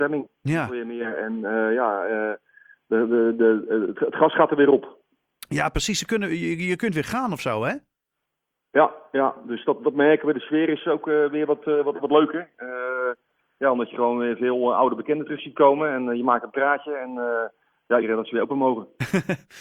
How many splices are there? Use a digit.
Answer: 1